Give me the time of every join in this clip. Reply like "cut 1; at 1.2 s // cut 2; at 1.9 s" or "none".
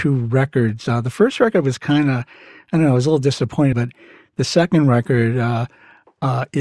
cut 1; at 3.7 s